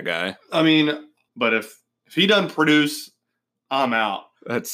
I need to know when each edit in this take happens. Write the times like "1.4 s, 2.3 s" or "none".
1.3 s

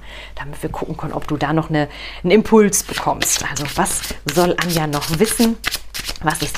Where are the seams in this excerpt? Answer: none

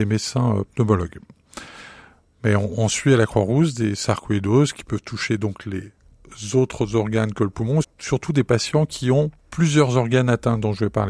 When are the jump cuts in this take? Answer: 7.8 s, 9.4 s

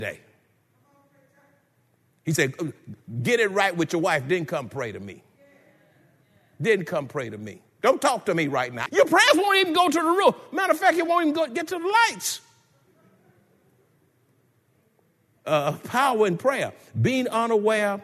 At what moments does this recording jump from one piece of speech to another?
8.9 s, 15.4 s

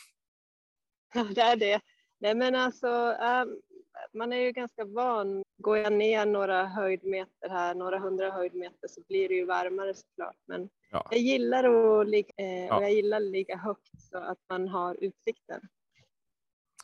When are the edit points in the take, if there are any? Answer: 5.4 s, 12.3 s

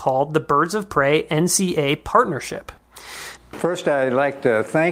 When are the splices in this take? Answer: 3.4 s

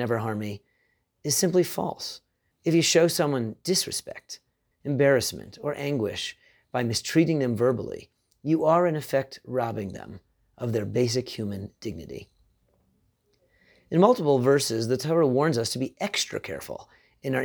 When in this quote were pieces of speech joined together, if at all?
2.5 s, 4.7 s

